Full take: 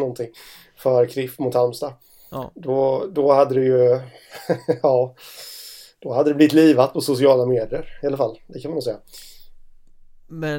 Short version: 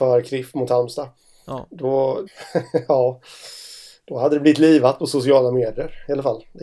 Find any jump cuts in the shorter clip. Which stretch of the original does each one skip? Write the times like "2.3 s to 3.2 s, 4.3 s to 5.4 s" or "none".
3.1 s to 4.2 s